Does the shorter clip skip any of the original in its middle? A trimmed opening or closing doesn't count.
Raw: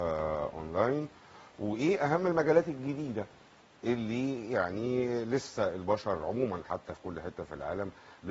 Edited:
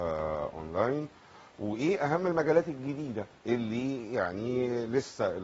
yes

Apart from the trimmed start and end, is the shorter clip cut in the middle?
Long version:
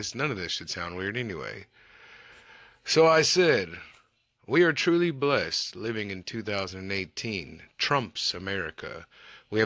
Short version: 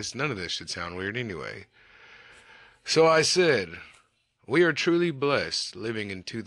no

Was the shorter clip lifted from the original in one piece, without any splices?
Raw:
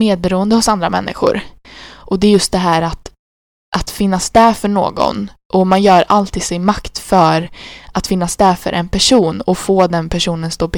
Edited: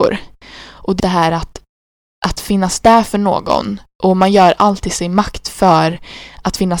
no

